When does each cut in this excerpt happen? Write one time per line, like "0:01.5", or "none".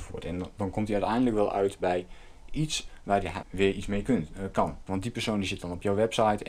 0:03.4
0:04.9